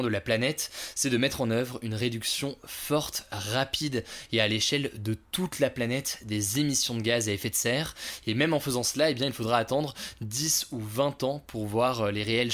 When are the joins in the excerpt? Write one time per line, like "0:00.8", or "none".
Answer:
none